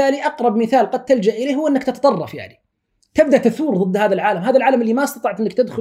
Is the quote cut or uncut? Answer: uncut